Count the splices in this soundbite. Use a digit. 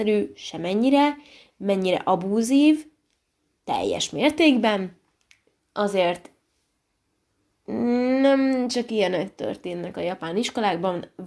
0